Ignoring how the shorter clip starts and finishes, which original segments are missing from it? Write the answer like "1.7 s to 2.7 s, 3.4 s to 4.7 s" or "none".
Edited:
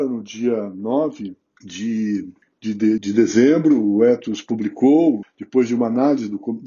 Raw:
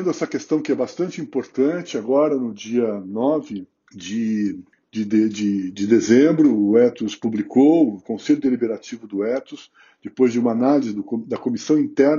5.3 s to 5.7 s, 8.0 s to 9.9 s